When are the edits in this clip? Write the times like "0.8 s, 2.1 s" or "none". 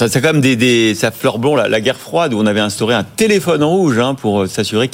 none

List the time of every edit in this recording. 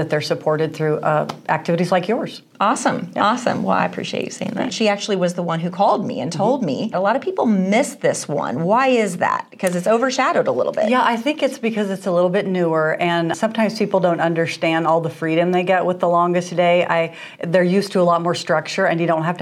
4.7 s, 6.9 s, 13.3 s

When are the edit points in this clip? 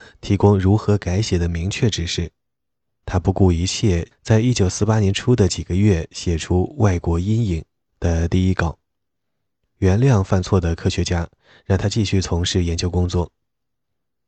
3.0 s, 4.1 s, 9.8 s

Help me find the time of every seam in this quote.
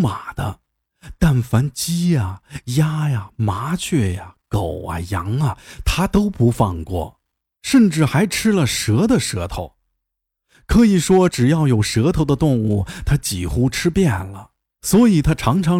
none

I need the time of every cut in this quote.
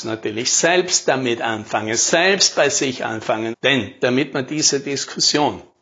3.5 s

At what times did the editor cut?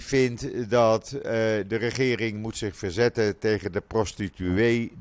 none

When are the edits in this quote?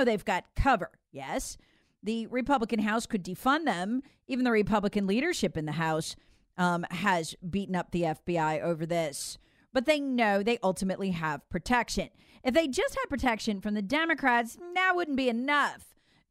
none

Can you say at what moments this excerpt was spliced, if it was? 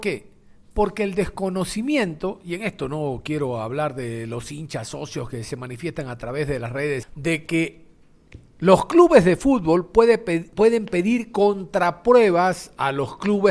7.0 s

